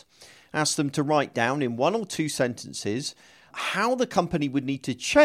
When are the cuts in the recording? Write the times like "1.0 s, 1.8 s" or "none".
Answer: 3.5 s